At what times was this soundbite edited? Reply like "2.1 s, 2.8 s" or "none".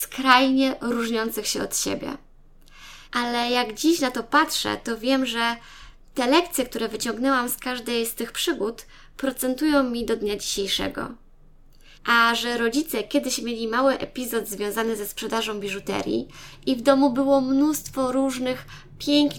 3.0 s, 11.9 s